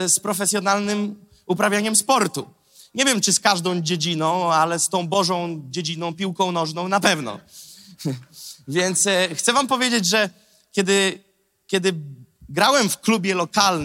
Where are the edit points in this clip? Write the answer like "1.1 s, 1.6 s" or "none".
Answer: none